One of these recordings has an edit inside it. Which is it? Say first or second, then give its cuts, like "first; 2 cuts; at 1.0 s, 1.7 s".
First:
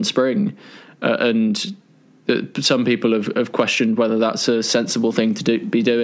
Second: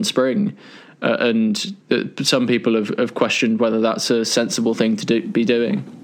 second; 1 cut; at 1.8 s